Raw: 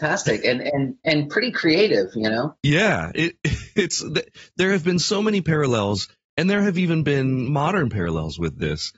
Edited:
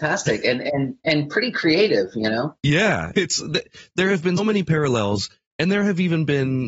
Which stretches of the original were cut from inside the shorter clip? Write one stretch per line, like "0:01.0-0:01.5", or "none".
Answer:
0:03.1-0:03.7
0:05.0-0:05.2